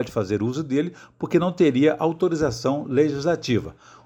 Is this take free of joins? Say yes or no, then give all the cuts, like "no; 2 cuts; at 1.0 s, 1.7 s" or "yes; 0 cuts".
yes; 0 cuts